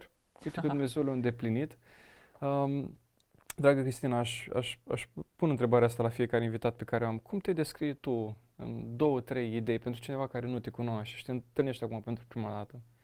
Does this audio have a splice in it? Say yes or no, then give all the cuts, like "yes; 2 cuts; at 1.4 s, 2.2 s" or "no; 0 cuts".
no; 0 cuts